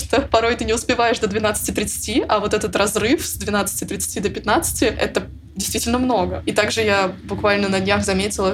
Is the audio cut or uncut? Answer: uncut